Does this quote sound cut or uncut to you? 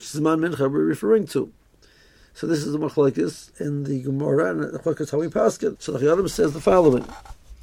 cut